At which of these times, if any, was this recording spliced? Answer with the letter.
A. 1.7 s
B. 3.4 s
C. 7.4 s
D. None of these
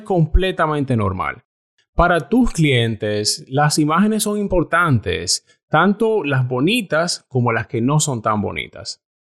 D